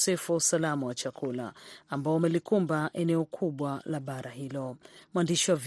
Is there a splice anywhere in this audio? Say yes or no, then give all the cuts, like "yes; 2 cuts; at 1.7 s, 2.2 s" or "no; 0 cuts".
no; 0 cuts